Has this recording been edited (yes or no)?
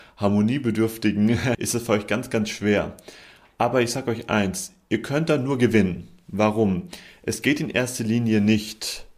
yes